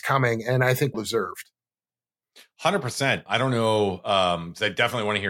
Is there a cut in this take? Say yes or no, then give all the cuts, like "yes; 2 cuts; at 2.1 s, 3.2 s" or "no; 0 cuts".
yes; 2 cuts; at 0.9 s, 3.3 s